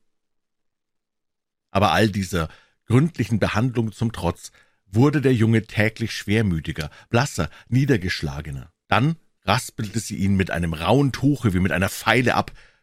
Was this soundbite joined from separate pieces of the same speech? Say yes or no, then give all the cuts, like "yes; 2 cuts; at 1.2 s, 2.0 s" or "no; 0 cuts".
yes; 1 cut; at 8.9 s